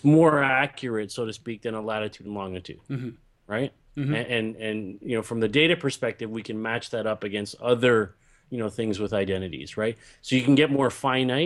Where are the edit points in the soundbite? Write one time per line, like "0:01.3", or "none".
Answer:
none